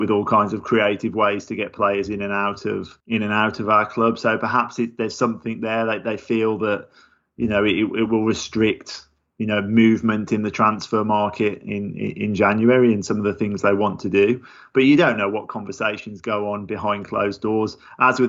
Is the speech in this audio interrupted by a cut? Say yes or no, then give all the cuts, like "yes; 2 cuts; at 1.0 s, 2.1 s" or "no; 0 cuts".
yes; 1 cut; at 3.0 s